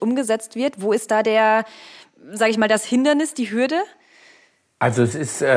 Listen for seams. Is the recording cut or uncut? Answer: uncut